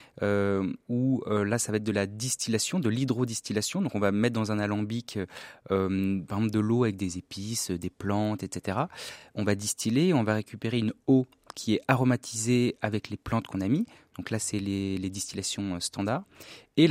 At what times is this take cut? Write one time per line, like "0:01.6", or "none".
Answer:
none